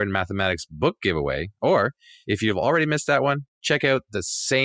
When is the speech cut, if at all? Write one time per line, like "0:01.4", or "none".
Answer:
none